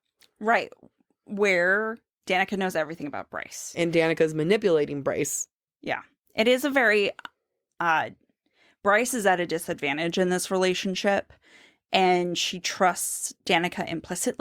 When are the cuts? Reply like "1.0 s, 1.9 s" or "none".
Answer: none